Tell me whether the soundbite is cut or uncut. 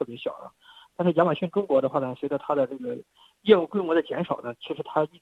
uncut